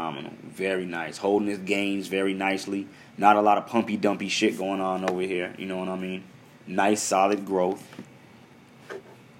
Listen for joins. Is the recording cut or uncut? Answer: uncut